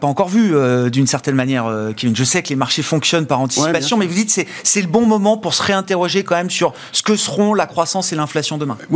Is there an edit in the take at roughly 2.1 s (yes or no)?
no